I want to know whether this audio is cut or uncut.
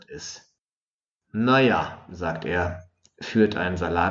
uncut